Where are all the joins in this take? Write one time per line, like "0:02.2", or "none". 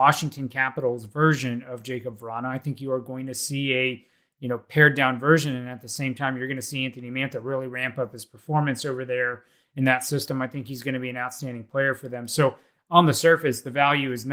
none